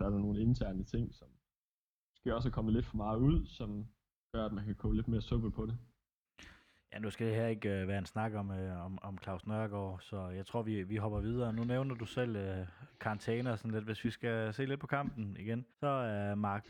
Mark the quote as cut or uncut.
cut